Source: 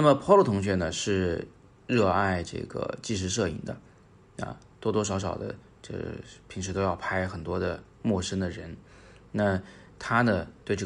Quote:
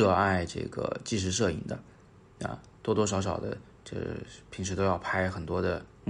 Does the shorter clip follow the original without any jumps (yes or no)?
yes